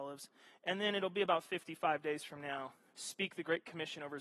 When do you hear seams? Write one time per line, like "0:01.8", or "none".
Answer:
0:02.9

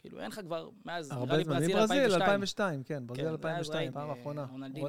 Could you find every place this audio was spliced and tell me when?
0:03.9

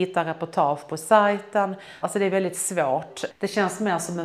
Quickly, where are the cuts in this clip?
0:02.0
0:03.3

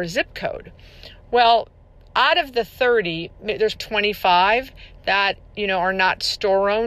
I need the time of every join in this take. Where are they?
0:03.8

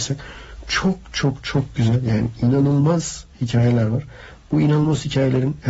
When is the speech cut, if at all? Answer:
none

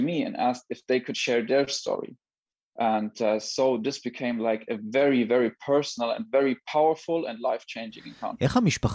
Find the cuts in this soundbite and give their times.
none

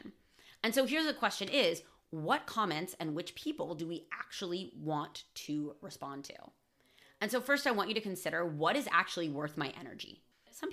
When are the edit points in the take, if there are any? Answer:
none

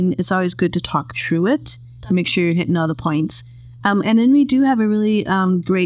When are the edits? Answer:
none

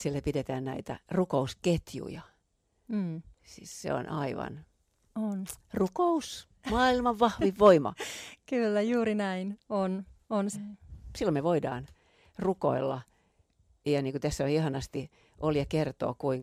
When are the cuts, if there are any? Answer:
0:10.5

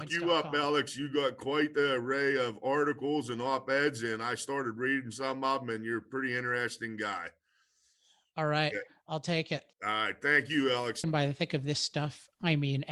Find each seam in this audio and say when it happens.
0:09.7
0:11.0

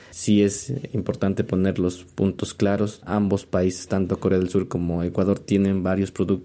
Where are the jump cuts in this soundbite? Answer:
none

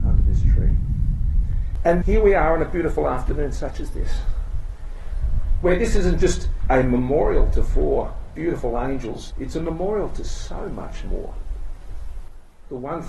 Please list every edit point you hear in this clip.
0:02.0
0:09.3

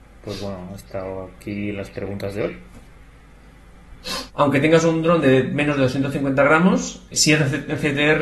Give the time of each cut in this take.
0:04.3
0:07.1

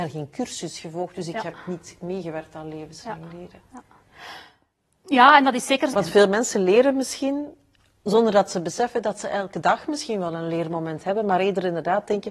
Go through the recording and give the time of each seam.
0:05.9

